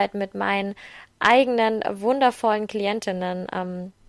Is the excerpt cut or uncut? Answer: uncut